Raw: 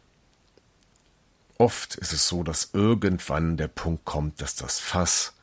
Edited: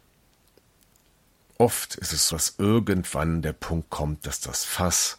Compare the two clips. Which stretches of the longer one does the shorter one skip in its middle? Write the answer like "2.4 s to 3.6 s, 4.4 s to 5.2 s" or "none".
2.3 s to 2.5 s